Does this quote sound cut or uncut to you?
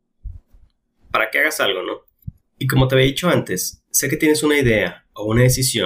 cut